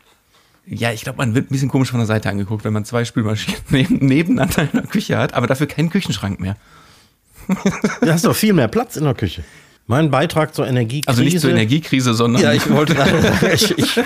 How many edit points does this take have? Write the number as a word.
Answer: one